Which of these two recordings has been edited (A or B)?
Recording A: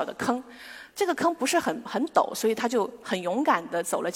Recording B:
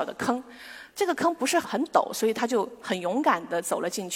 B